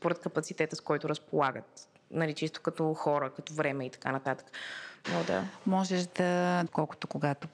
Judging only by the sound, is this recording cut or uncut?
cut